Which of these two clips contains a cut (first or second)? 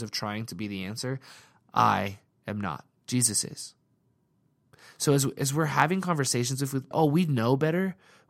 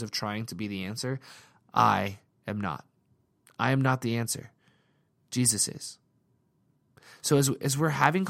first